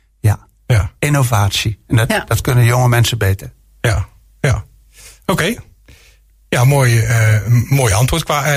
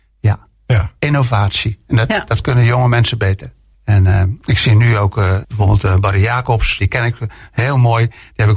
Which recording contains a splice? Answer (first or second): second